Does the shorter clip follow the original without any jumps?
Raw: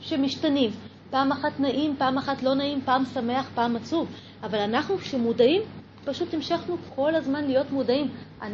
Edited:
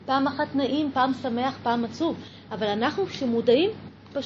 no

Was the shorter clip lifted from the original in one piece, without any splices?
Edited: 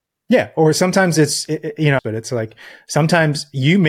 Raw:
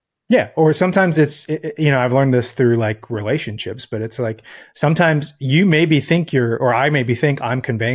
no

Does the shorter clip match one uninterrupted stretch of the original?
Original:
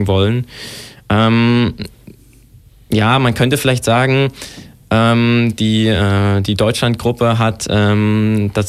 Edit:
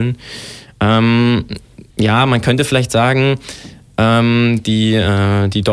no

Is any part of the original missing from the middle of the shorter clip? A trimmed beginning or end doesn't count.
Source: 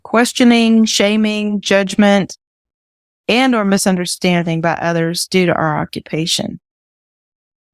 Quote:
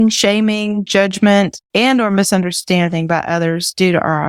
yes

